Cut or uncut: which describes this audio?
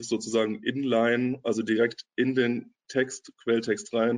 uncut